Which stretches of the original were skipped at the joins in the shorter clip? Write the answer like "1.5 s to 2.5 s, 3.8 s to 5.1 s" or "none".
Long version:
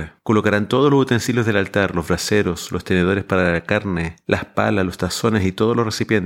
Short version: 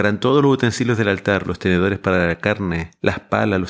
1.9 s to 2.7 s